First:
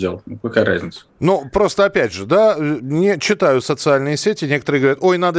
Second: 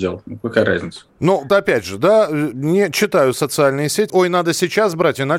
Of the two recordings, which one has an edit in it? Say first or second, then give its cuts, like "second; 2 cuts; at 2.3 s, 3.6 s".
second; 2 cuts; at 1.5 s, 4.1 s